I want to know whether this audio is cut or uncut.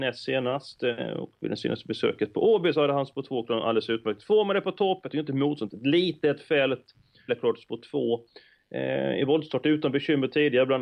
cut